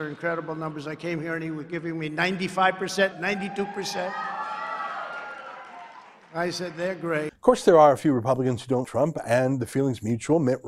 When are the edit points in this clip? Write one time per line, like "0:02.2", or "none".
0:03.1
0:08.8